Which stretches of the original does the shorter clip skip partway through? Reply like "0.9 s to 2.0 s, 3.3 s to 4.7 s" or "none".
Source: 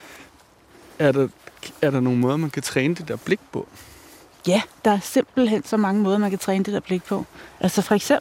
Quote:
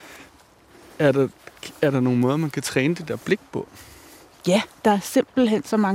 none